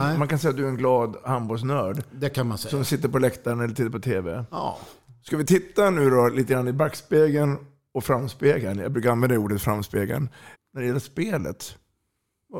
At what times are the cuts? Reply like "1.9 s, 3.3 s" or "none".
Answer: 10.5 s